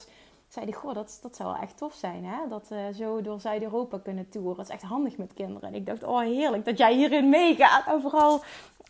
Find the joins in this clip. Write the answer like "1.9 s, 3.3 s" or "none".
7.9 s